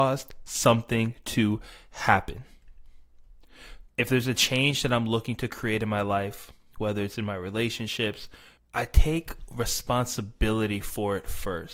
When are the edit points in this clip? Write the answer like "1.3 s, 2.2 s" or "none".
3.9 s, 6.8 s, 8.6 s

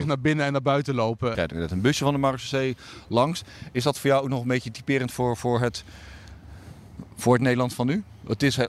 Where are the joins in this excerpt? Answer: 1.3 s

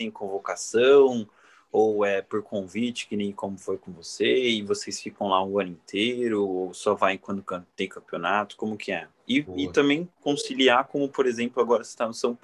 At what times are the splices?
none

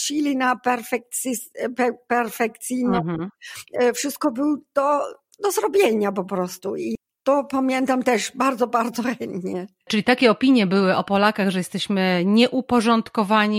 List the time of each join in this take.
none

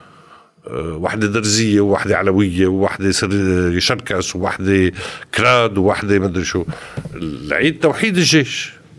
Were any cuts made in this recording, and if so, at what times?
none

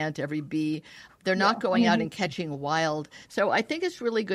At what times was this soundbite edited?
1.1 s, 3.3 s

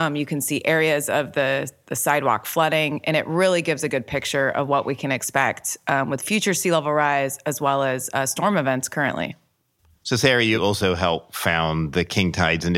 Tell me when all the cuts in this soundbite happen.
none

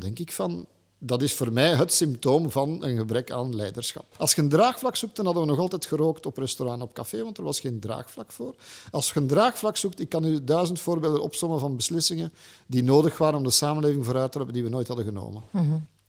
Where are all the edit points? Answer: 4.2 s

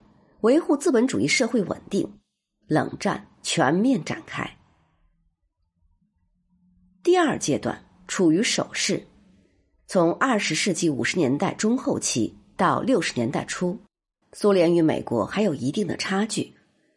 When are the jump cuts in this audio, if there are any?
8.0 s, 14.2 s

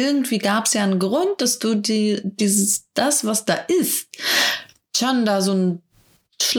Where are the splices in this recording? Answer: none

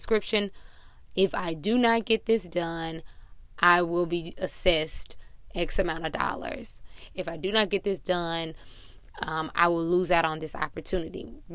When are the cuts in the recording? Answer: 7.1 s

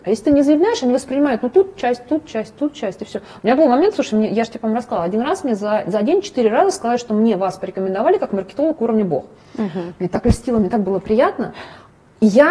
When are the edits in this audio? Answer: none

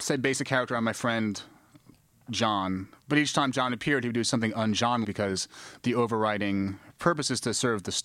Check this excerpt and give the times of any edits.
5.0 s

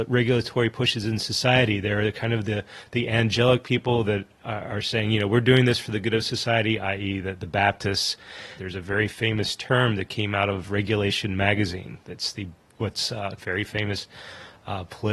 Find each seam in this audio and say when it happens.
8.6 s, 13.4 s

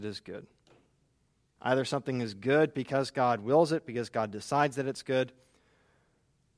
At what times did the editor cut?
1.6 s

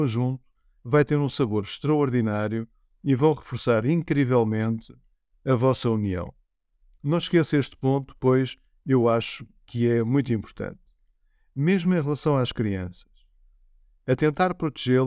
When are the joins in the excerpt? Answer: none

